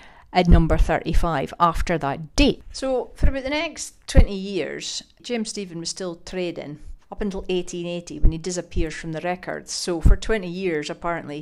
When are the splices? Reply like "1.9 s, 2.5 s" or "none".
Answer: 7.0 s